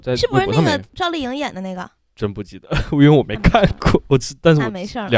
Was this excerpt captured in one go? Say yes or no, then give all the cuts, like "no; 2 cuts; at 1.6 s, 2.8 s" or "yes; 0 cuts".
yes; 0 cuts